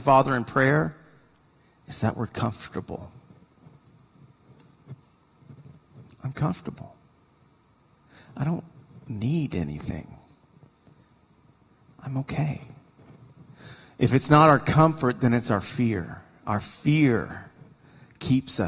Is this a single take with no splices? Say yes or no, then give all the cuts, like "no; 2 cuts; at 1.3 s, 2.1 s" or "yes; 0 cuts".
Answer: yes; 0 cuts